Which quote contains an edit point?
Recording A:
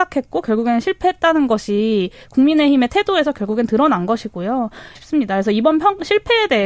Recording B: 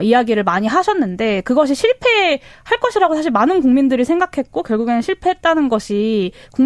A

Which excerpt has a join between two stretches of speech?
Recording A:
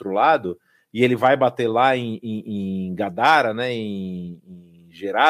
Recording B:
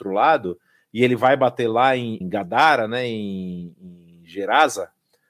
B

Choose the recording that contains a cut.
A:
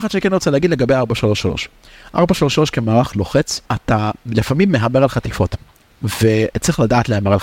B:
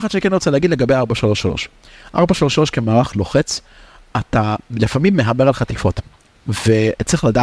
A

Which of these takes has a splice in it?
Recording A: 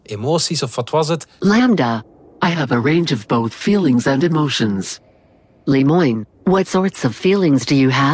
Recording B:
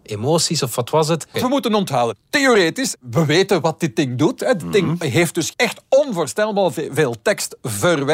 B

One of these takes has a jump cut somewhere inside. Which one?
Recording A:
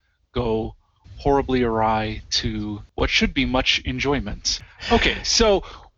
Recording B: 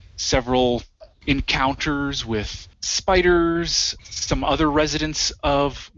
B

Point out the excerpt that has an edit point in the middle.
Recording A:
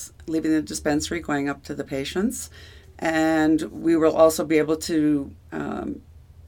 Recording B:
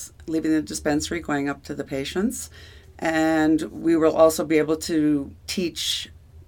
B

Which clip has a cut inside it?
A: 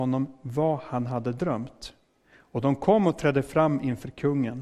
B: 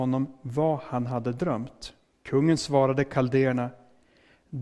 B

